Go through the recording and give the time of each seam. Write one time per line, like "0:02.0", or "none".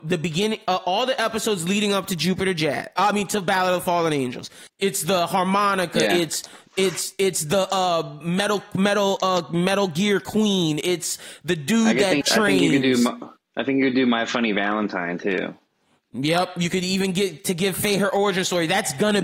0:04.7
0:12.2